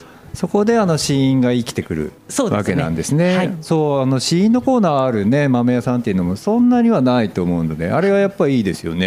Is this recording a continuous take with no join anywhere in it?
yes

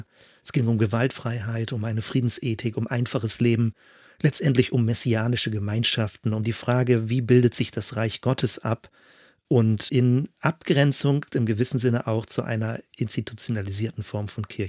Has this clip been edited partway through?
no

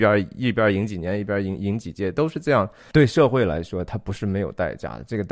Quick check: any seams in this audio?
yes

